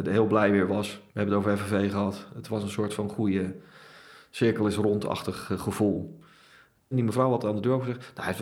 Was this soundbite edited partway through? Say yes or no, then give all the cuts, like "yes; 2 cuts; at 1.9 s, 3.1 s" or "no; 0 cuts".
yes; 2 cuts; at 1.1 s, 6.9 s